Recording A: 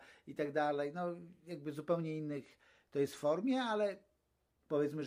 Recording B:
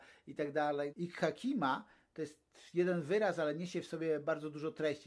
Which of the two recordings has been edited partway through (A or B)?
B